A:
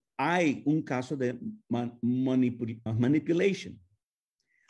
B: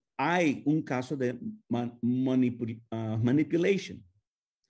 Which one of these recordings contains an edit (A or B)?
A